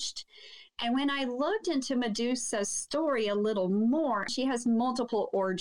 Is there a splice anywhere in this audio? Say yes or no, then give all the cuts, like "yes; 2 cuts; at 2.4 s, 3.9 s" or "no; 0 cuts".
yes; 1 cut; at 4.3 s